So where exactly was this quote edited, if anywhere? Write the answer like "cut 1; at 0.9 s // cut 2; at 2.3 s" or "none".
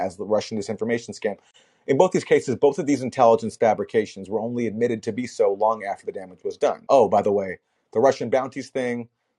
cut 1; at 6.9 s